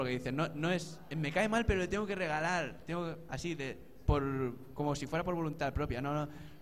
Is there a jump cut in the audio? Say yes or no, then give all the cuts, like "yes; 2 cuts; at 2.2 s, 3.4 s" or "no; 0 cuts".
no; 0 cuts